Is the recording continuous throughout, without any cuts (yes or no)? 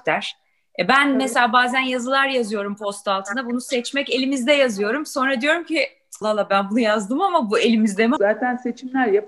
no